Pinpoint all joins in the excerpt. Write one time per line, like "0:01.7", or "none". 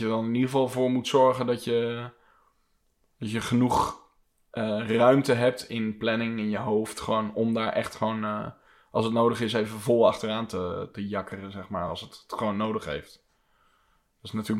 none